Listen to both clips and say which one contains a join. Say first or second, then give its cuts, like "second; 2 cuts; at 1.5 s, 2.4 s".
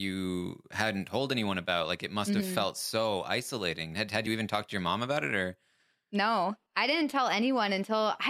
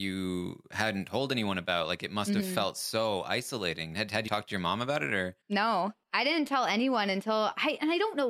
second; 2 cuts; at 4.3 s, 5.4 s